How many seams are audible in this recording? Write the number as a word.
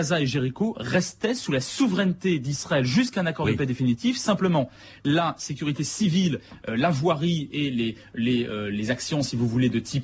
zero